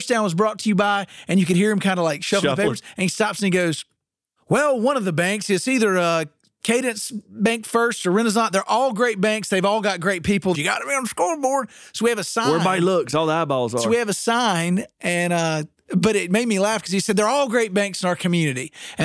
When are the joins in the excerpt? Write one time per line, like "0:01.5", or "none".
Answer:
0:10.5